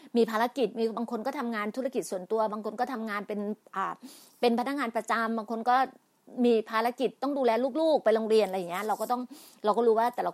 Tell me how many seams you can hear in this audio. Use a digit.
0